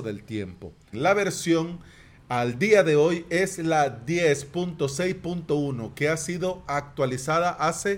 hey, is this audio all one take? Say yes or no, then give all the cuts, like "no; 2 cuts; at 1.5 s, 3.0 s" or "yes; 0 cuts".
no; 1 cut; at 0.9 s